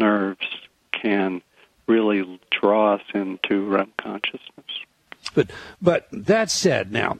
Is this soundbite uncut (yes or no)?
no